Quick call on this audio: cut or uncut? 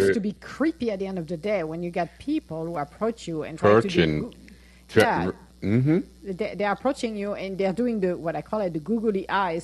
uncut